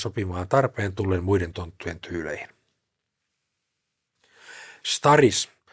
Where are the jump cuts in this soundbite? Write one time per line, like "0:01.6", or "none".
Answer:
none